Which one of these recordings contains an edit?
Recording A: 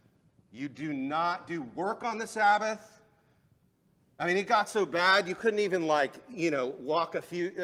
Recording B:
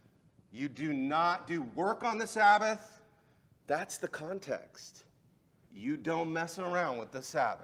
B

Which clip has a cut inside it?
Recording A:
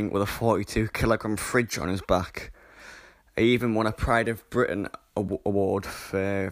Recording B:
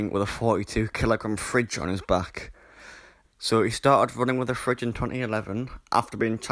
B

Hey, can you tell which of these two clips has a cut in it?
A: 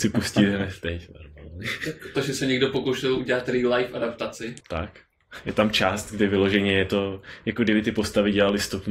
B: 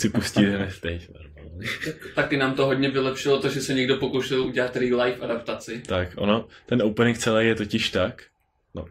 A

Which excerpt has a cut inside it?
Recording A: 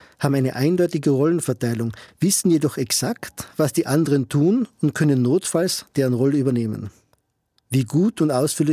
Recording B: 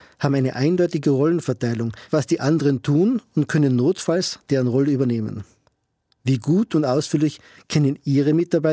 B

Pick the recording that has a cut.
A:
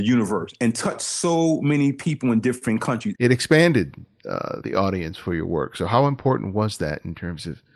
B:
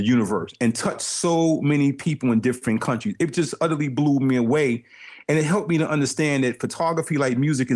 A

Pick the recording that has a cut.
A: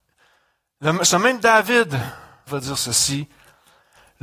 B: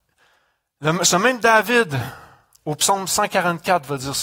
A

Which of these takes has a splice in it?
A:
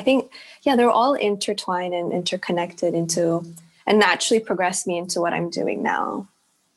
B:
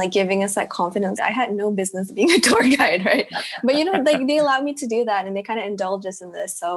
B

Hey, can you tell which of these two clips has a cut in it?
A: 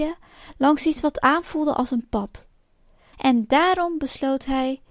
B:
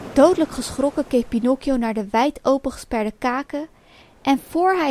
A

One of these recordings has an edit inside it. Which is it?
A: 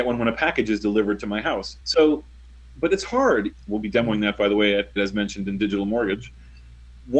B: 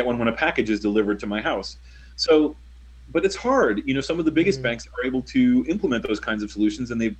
A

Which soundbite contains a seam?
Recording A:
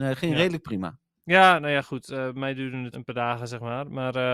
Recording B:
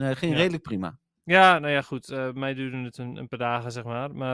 A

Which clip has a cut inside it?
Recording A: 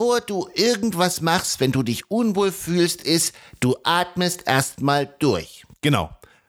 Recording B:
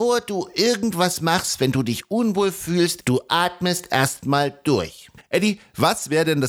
B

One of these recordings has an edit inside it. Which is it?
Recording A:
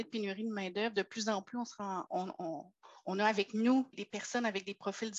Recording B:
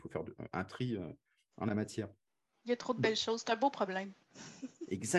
A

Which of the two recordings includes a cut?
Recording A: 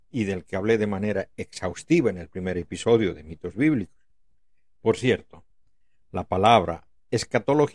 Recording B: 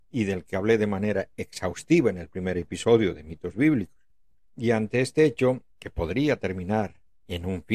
B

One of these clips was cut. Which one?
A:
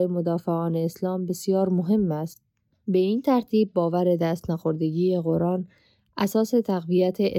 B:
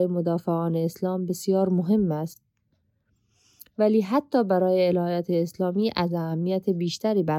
A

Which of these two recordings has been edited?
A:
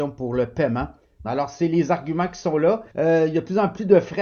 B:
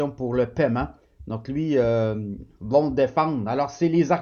A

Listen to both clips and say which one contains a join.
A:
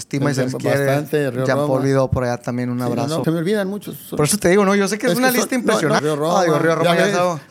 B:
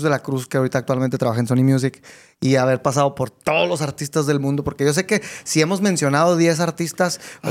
A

